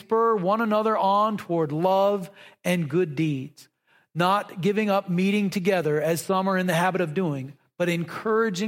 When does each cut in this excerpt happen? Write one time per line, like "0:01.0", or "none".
none

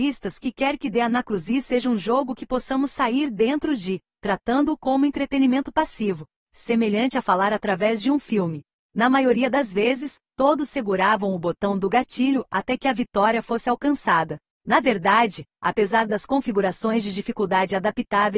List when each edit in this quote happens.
0:08.8

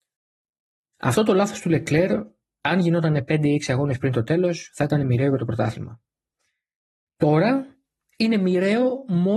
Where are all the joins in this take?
none

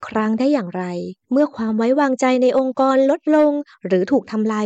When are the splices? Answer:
0:01.2

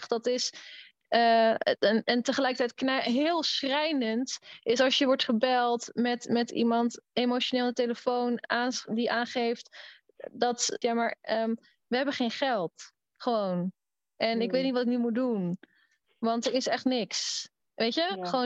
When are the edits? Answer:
0:10.8

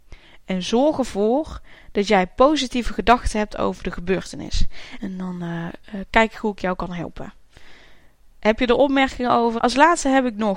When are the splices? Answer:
0:05.0
0:09.6

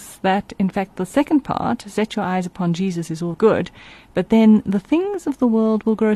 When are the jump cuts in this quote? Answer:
0:03.3

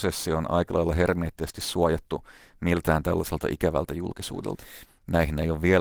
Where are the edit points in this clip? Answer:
0:04.9

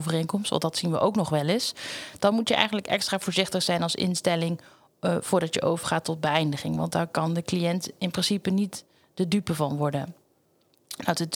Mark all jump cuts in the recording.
none

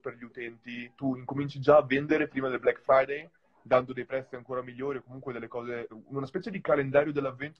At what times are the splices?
0:01.0
0:05.9

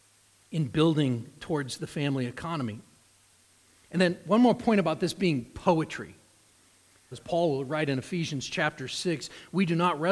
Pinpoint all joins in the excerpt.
0:07.1

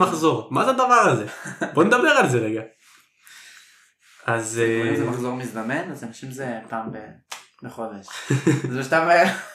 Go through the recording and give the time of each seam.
none

